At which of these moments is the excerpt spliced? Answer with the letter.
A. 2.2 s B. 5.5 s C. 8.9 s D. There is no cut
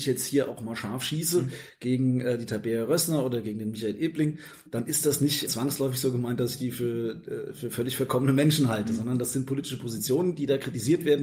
B